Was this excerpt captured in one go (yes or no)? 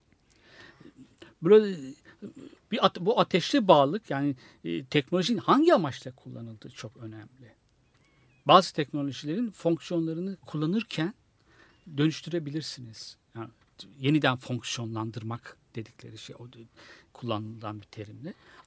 yes